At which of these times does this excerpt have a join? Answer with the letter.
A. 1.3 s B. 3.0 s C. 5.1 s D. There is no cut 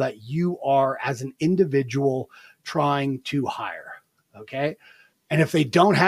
C